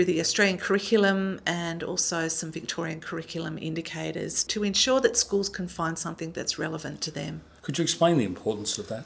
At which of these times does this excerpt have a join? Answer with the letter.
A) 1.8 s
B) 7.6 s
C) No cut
B